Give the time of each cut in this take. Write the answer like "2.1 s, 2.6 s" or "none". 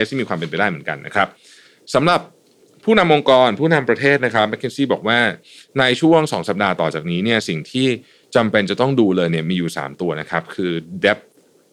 6.4 s